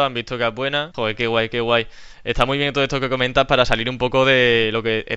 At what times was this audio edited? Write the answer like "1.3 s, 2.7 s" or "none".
0.9 s